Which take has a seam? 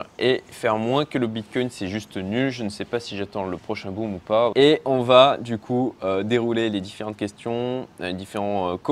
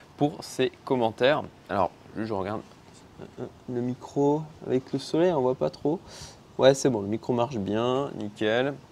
first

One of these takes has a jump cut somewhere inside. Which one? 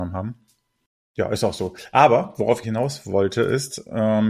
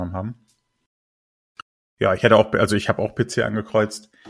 first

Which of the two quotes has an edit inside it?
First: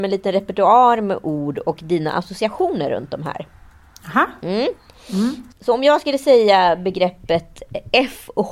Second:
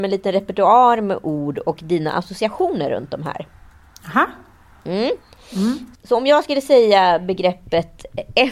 first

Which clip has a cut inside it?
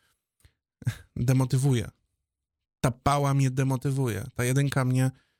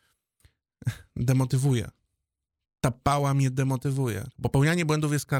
second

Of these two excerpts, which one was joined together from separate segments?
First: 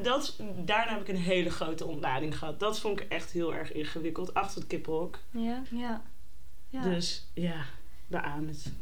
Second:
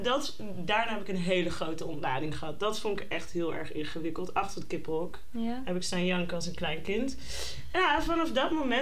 first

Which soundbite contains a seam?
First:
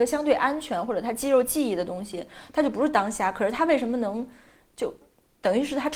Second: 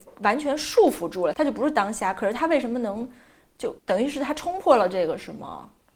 second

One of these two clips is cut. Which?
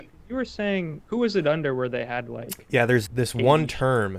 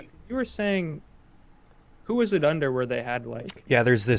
first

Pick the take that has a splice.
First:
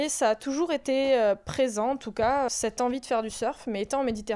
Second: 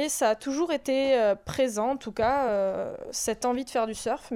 first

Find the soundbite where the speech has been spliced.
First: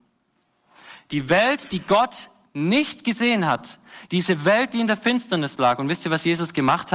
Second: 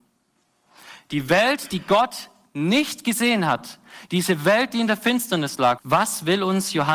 second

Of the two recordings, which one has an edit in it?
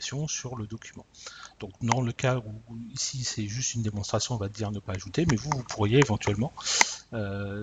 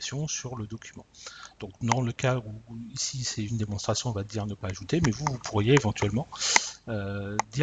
second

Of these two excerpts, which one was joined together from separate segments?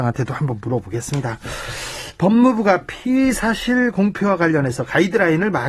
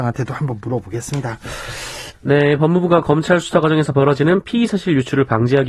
second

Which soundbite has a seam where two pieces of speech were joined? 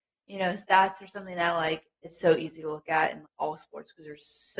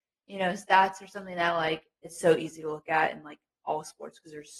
first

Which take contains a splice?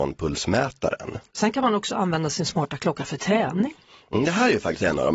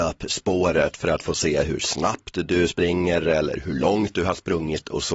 first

